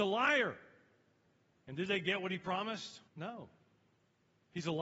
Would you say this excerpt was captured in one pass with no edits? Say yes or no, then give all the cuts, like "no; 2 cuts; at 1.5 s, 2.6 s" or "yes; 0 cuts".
no; 2 cuts; at 1.5 s, 3.1 s